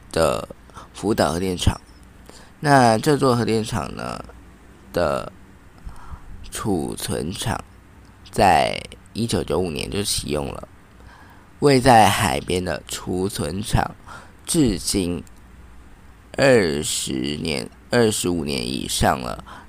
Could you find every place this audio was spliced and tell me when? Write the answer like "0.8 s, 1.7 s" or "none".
none